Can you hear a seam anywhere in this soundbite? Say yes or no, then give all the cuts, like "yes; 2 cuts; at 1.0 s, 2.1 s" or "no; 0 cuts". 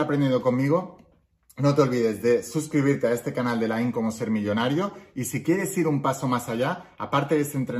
no; 0 cuts